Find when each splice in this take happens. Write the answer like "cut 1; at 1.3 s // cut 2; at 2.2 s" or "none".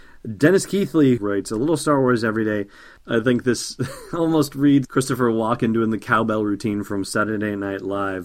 cut 1; at 1.2 s // cut 2; at 3.0 s // cut 3; at 4.8 s